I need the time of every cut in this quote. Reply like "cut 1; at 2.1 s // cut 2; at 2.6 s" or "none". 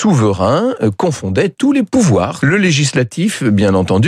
cut 1; at 2.4 s